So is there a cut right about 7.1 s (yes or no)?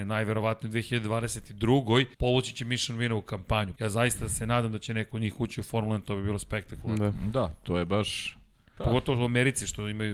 no